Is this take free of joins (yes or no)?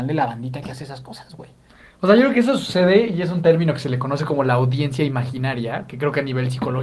yes